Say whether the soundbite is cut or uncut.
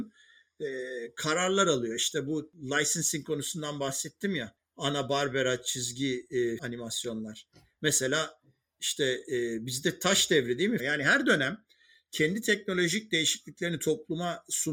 cut